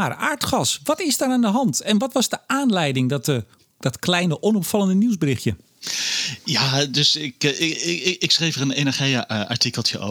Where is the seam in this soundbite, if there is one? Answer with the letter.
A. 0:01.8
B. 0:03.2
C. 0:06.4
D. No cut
D